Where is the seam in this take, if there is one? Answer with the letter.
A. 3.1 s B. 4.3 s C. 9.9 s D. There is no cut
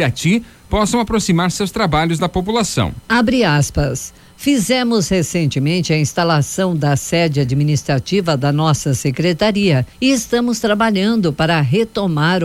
C